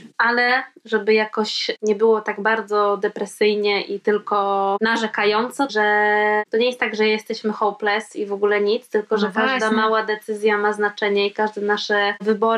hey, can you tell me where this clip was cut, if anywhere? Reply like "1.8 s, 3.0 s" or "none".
5.7 s